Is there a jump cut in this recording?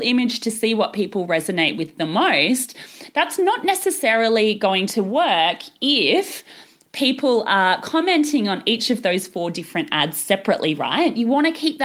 no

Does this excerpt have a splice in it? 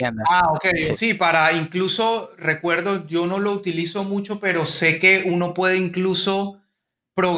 yes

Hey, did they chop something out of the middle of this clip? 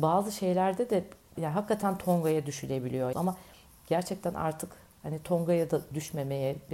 yes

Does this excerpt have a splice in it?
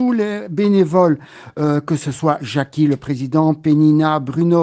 no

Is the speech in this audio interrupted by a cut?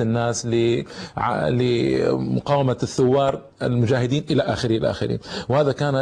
yes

